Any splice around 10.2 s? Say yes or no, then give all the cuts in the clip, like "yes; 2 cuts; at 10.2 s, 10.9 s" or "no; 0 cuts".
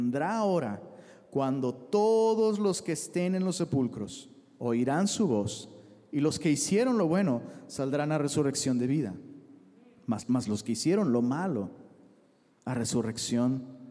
yes; 1 cut; at 10.2 s